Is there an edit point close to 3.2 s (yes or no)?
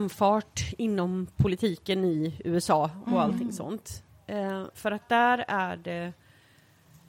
no